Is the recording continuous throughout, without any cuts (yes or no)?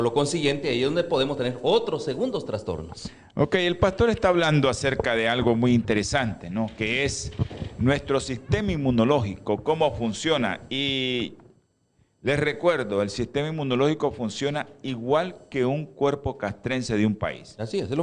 yes